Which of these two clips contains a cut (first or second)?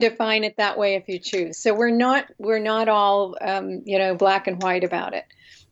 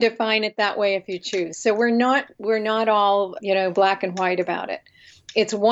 second